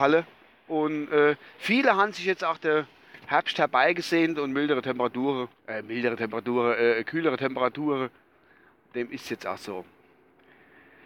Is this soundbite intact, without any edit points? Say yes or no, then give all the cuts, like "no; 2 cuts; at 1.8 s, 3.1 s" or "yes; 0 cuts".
no; 1 cut; at 5.6 s